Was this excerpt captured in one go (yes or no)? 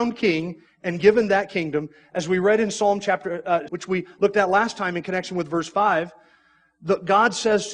no